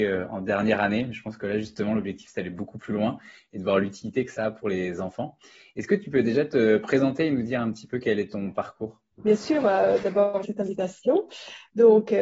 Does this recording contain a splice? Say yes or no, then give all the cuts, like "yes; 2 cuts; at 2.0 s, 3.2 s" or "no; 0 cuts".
yes; 2 cuts; at 9.1 s, 10.4 s